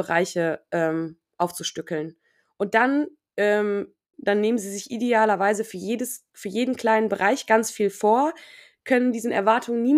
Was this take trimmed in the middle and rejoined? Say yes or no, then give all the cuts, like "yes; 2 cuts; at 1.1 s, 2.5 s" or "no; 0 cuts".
yes; 1 cut; at 4.1 s